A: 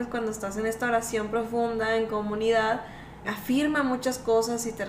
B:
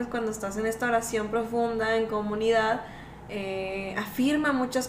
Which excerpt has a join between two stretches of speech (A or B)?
A